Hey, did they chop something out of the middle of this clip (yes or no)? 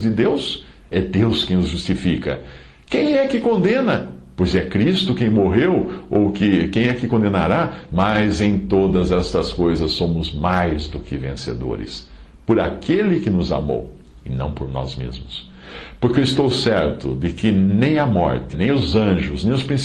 yes